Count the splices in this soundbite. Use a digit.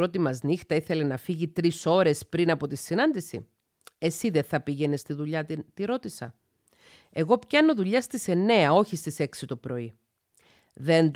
0